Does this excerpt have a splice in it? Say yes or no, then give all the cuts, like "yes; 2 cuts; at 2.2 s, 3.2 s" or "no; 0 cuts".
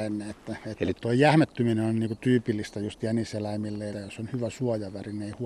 yes; 2 cuts; at 0.9 s, 3.9 s